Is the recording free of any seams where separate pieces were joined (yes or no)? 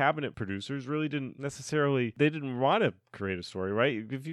yes